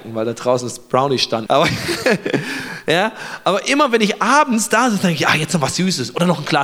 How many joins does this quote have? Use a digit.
1